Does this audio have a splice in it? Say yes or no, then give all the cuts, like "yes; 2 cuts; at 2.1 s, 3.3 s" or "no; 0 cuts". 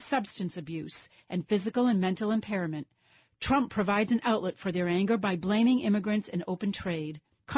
no; 0 cuts